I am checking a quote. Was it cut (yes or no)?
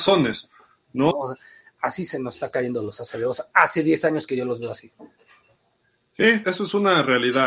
yes